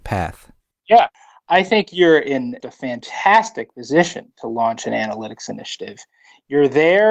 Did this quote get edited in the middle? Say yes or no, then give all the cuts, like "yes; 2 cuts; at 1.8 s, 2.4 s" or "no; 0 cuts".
yes; 1 cut; at 2.6 s